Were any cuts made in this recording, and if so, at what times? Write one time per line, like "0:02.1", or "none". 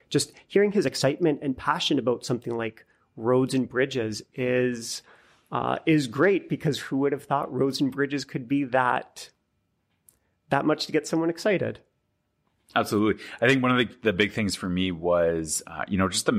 none